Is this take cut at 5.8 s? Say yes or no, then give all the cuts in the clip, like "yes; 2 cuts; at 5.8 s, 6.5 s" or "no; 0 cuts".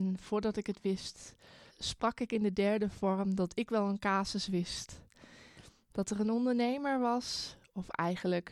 no; 1 cut; at 1.7 s